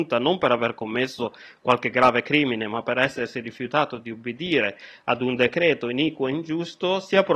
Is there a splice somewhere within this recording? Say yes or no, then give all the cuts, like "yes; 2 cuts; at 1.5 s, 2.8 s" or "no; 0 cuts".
no; 0 cuts